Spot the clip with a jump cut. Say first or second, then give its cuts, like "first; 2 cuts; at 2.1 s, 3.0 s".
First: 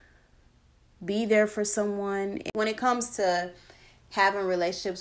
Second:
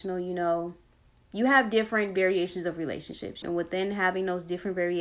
second; 1 cut; at 3.4 s